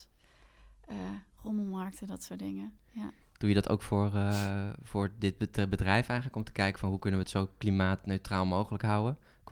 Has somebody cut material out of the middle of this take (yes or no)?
yes